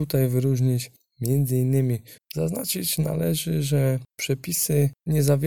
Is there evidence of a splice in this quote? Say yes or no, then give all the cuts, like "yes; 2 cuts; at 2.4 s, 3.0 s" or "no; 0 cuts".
yes; 1 cut; at 2.2 s